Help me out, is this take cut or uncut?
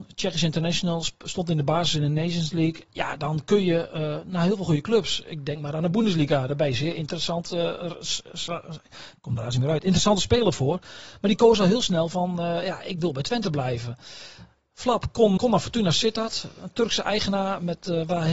cut